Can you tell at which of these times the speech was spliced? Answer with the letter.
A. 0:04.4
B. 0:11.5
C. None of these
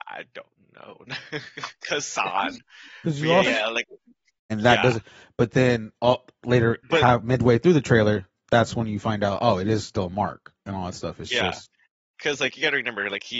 A